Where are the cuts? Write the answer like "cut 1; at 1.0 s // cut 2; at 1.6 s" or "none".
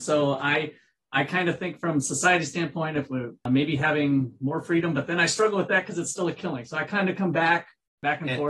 cut 1; at 3.4 s